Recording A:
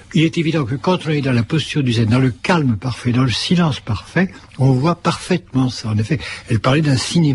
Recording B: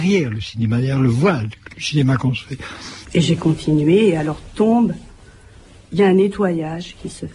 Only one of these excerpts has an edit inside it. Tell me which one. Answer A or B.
B